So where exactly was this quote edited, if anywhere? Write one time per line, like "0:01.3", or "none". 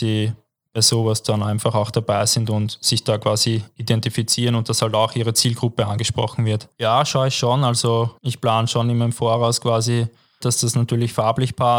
0:06.8
0:10.4